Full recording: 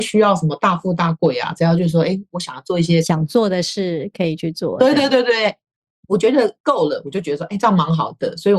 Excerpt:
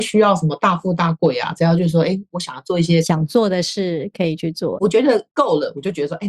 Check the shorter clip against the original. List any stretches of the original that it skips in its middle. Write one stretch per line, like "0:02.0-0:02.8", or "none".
0:04.8-0:06.1